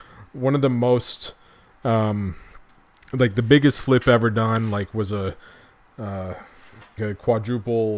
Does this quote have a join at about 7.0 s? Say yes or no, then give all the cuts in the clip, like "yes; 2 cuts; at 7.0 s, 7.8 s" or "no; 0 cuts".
yes; 1 cut; at 7.0 s